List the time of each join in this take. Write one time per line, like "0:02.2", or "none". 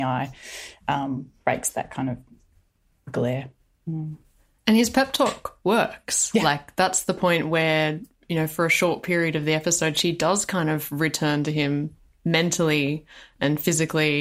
none